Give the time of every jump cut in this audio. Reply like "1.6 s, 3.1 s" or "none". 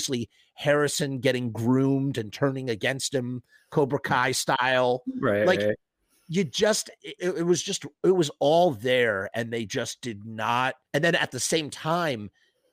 7.2 s, 10.8 s